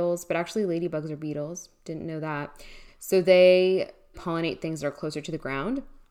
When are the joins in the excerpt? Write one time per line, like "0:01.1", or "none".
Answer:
0:02.9
0:04.1